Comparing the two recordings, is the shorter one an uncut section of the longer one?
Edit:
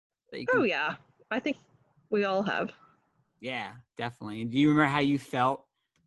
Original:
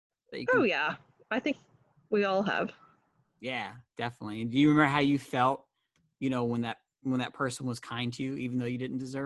yes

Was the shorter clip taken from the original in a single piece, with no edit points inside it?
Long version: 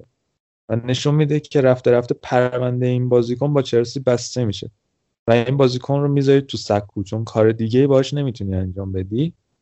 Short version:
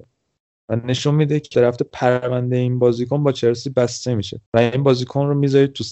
no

